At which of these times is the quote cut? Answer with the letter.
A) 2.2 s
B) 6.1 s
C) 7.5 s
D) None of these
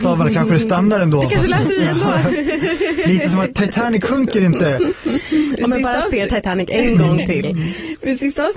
D